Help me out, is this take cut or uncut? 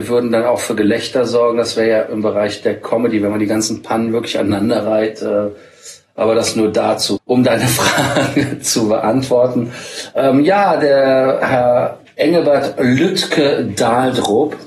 cut